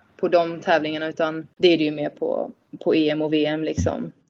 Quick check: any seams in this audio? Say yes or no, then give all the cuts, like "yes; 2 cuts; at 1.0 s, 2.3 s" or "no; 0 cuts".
no; 0 cuts